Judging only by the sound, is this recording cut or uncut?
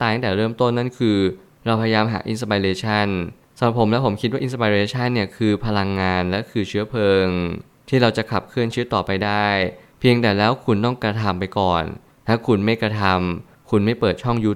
uncut